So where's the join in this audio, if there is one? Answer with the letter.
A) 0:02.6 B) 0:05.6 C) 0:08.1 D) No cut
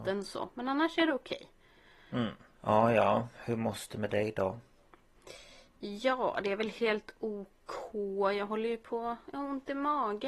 A